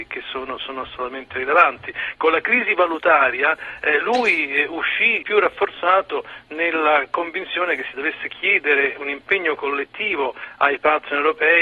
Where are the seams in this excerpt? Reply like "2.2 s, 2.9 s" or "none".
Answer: 5.2 s